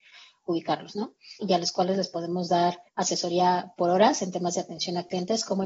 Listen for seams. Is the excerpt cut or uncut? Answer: cut